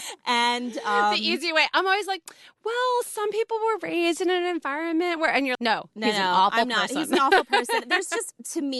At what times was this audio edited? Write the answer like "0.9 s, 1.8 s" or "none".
5.5 s